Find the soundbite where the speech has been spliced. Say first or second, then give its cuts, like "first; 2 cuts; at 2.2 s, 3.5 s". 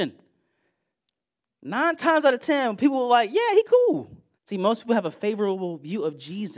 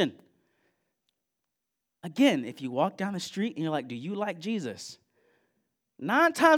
first; 2 cuts; at 1.4 s, 4.3 s